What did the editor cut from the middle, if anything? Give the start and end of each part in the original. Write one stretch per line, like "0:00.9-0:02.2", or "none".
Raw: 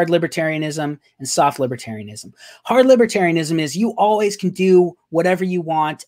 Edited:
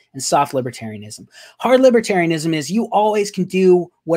none

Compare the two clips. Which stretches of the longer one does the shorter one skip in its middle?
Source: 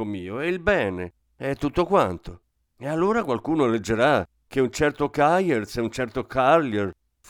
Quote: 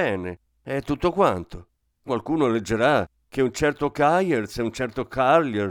0:02.8-0:03.2

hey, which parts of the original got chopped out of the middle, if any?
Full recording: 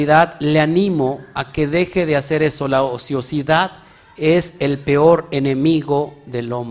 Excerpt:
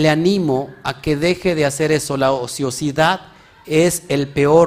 none

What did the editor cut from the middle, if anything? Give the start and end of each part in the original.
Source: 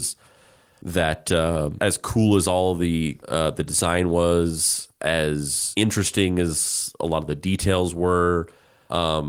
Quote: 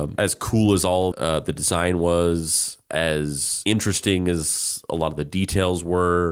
0:02.7-0:03.2

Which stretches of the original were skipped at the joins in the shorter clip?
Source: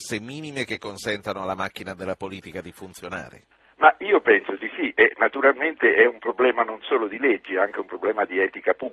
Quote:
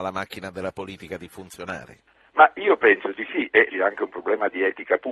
0:05.1-0:07.5

